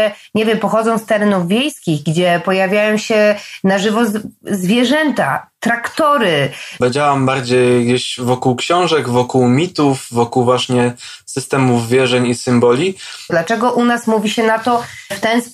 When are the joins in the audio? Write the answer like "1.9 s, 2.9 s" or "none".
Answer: 6.8 s, 13.3 s